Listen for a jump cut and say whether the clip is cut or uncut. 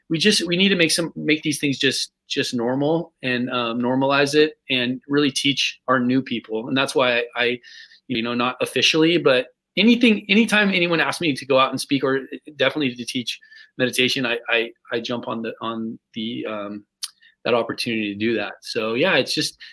cut